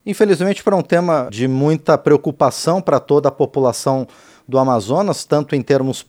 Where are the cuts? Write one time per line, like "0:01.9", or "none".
0:01.3